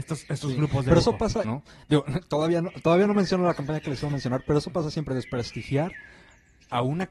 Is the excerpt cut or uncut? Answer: cut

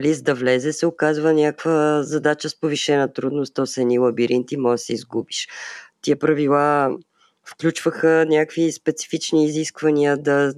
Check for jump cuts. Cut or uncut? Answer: cut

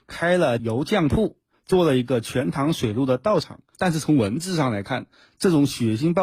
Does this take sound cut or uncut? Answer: cut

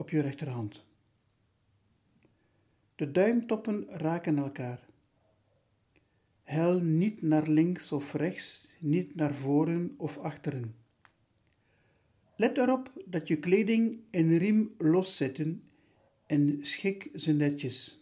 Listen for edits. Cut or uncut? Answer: cut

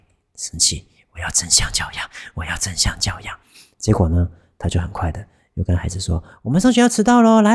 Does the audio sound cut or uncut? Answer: uncut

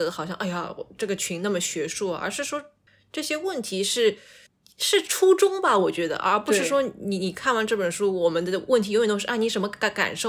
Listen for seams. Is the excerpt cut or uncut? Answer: uncut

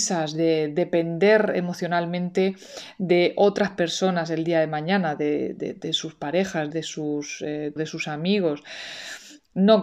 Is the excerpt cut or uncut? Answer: cut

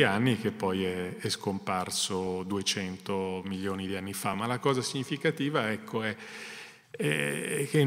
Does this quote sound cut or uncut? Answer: uncut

